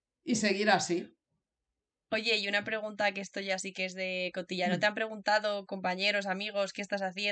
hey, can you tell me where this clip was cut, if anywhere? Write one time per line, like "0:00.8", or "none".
none

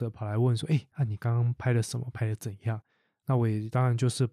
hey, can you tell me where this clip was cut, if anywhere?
none

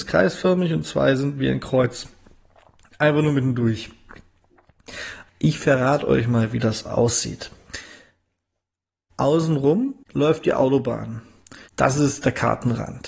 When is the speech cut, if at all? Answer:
0:05.3
0:10.0
0:11.7

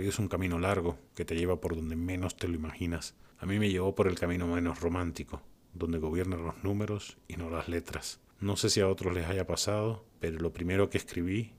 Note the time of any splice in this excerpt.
0:05.7
0:08.3

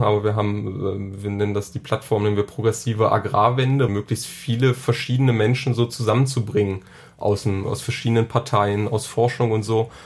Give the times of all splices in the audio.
0:03.9
0:07.6

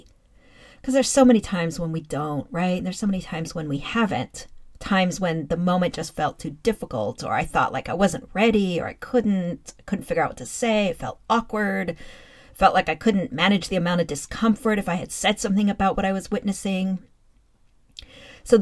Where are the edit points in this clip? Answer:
none

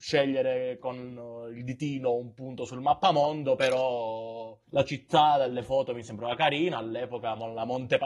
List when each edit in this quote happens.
0:04.6

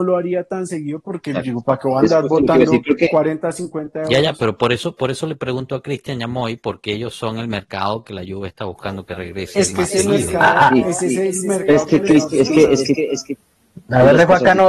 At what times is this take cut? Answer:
none

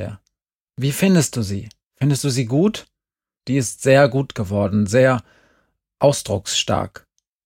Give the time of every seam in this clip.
0:03.4

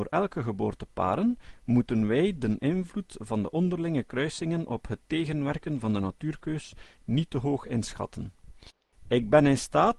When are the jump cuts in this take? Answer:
0:08.9

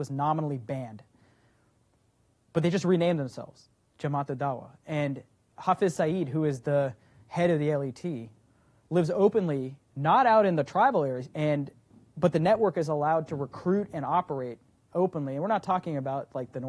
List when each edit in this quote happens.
0:11.2

